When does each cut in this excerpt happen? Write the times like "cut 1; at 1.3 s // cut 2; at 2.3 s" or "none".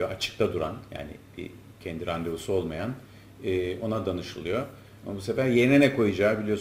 cut 1; at 5.0 s